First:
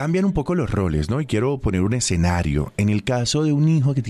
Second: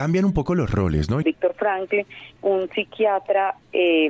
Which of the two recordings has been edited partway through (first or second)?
second